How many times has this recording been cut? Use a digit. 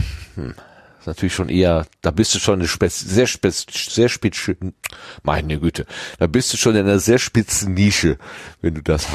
0